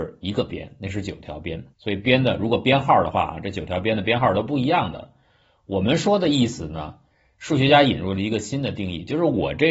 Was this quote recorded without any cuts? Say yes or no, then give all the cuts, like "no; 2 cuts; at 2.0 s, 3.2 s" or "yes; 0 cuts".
no; 1 cut; at 1.7 s